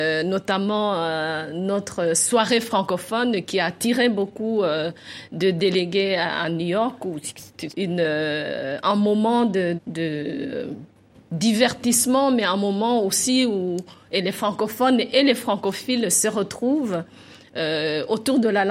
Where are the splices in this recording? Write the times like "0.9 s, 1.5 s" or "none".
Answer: 7.7 s, 9.8 s

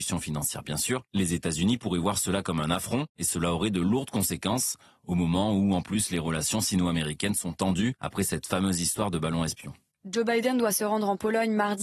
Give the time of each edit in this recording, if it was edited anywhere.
9.9 s

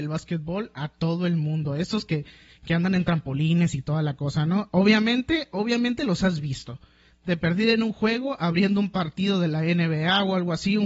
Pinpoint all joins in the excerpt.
none

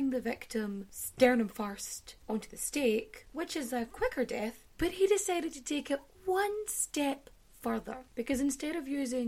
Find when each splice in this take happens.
4.7 s

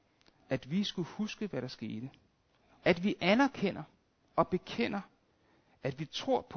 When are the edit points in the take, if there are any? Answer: 2.8 s

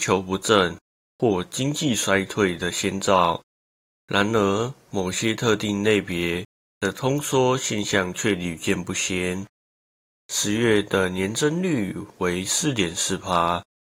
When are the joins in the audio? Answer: 10.1 s

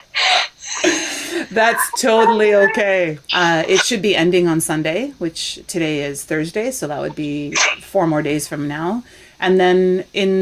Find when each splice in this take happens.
3.3 s

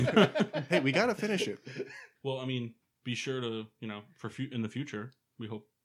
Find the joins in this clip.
2.1 s

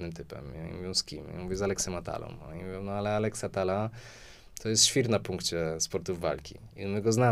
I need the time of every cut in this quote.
none

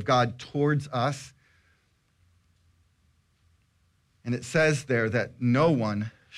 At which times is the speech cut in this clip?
4.2 s

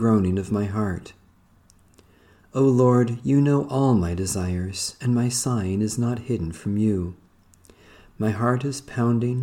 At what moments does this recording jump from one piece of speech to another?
none

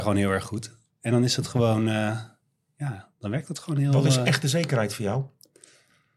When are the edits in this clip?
none

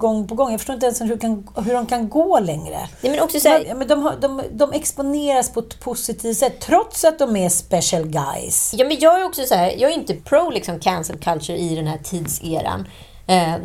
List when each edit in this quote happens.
3.6 s

